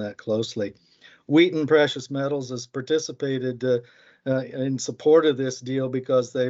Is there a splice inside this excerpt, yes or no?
no